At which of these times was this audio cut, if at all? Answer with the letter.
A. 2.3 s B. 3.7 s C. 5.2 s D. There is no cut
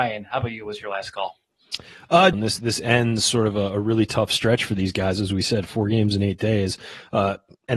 A